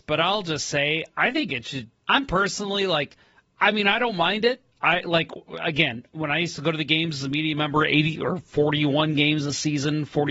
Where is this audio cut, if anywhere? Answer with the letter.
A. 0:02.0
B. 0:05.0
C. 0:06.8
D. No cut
A